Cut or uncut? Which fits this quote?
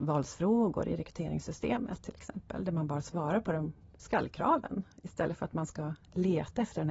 uncut